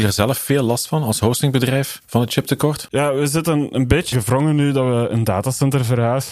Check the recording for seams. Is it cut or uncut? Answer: cut